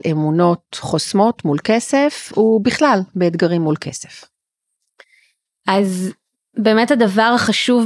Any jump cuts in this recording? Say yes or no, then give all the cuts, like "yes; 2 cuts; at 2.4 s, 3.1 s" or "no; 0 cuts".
no; 0 cuts